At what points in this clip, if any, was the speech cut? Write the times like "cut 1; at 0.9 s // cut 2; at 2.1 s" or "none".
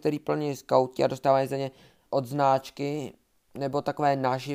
cut 1; at 2.1 s